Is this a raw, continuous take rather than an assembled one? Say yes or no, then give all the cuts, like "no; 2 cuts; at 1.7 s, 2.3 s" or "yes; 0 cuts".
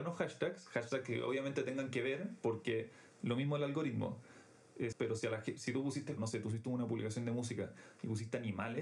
no; 2 cuts; at 4.9 s, 6.2 s